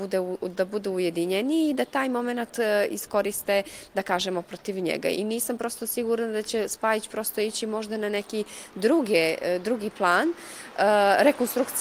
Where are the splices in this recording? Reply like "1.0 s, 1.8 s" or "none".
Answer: none